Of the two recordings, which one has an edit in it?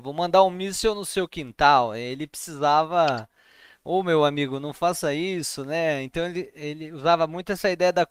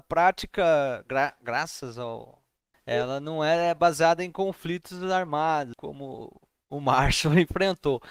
second; 2 cuts; at 2.7 s, 5.7 s

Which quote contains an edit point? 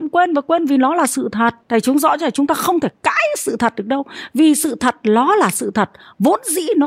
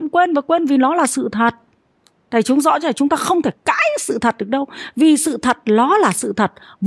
first; 1 cut; at 1.6 s

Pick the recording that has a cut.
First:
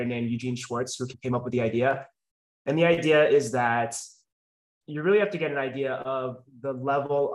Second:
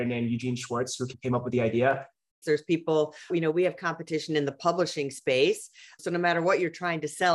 second; 1 cut; at 2.4 s

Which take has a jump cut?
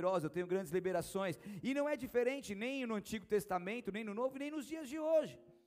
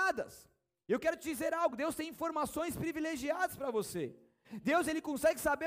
first; 1 cut; at 1.6 s

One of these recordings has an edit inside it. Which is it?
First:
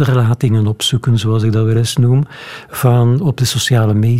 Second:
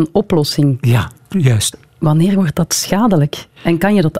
second; 1 cut; at 1.7 s

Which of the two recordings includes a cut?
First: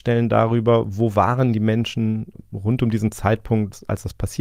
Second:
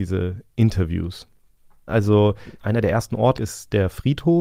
second; 2 cuts; at 1.9 s, 3.3 s

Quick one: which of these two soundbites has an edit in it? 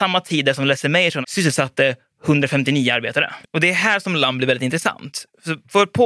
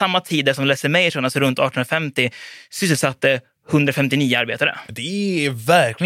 first; 2 cuts; at 1.2 s, 3.4 s

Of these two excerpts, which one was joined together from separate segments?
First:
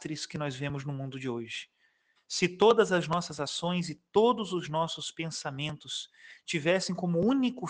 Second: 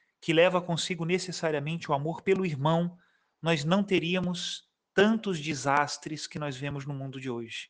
first; 1 cut; at 2.2 s

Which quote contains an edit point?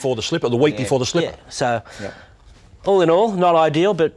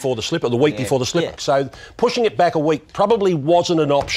second; 2 cuts; at 1.4 s, 2.9 s

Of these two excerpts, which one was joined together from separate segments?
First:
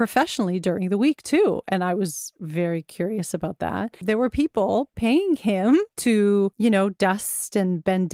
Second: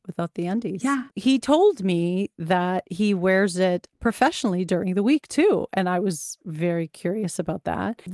second; 1 cut; at 1.1 s

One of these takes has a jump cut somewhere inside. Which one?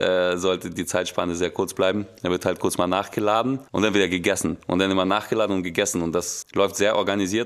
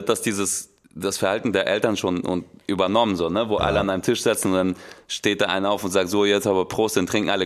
first; 2 cuts; at 3.7 s, 6.4 s

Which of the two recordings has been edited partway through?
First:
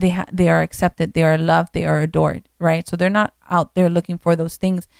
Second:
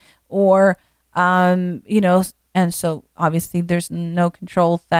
second; 1 cut; at 2.5 s

